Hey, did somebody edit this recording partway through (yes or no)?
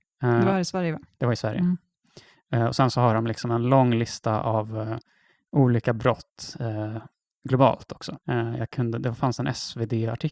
no